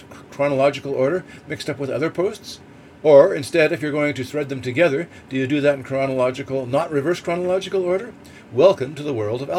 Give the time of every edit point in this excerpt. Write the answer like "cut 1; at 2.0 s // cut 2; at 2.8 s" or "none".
none